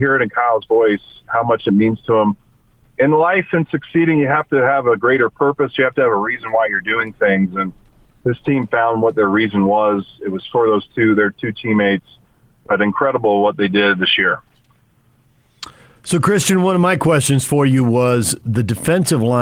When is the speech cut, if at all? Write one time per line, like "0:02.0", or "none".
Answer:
none